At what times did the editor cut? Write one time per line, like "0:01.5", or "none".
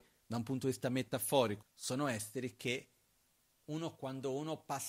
0:01.6